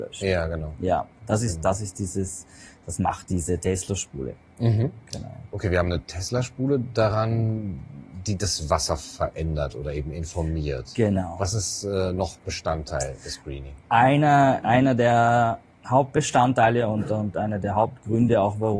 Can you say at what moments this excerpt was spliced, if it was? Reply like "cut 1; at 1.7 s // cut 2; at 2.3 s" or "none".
none